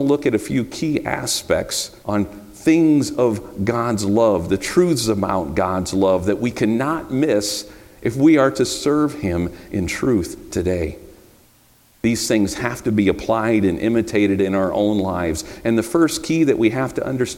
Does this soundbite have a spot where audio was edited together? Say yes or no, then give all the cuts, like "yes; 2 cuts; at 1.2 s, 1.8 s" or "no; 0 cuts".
yes; 1 cut; at 2.0 s